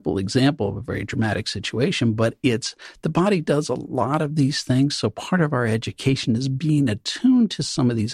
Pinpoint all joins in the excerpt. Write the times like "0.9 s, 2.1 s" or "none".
none